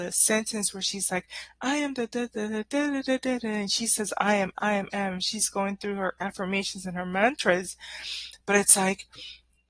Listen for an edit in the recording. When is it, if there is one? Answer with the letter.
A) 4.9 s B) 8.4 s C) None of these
A